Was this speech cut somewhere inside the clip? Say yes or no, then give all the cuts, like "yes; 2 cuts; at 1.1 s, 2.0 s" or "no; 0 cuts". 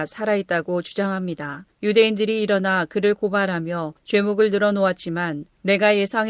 yes; 1 cut; at 1.7 s